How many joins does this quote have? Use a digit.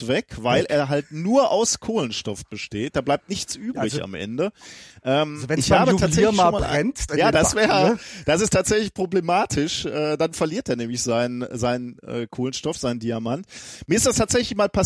1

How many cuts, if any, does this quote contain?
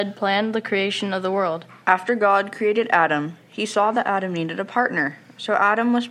1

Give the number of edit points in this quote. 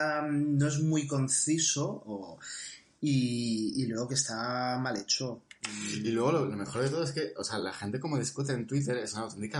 0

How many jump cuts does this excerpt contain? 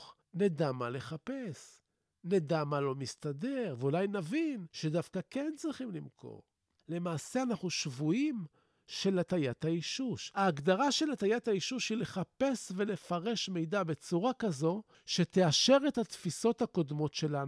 0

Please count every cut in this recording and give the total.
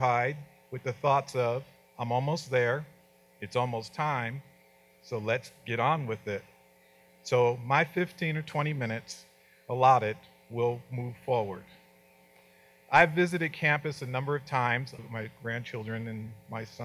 1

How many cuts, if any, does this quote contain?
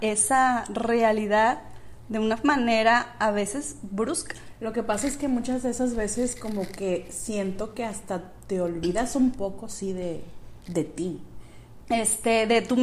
1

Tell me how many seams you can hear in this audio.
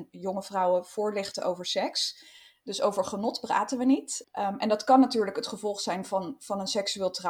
2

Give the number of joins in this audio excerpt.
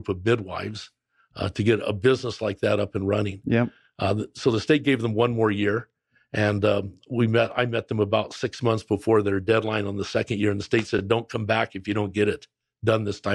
0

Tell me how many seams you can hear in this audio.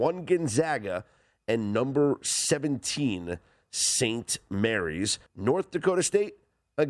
1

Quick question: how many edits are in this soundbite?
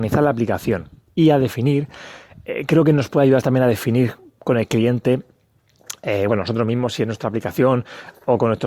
1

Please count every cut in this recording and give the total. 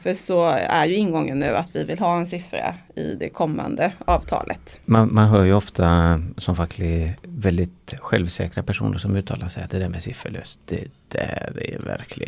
1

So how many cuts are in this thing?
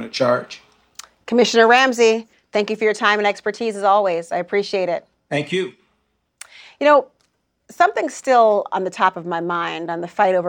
0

